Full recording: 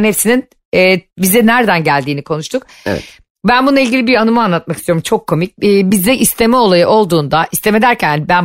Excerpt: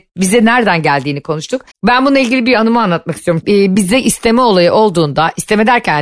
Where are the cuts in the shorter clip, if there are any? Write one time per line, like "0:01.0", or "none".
0:01.7
0:03.4